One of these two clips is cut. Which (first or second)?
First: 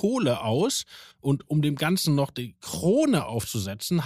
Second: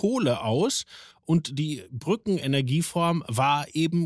first